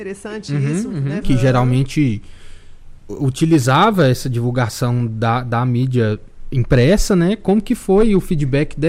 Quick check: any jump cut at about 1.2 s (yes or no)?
yes